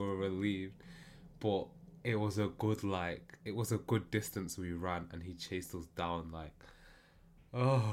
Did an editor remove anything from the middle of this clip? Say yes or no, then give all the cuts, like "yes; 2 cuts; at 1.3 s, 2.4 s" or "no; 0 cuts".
no; 0 cuts